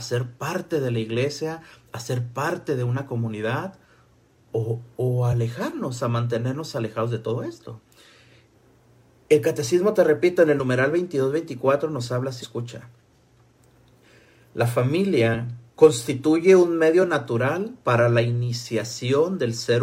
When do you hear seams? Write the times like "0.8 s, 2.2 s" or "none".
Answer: 12.4 s, 15.7 s, 17.8 s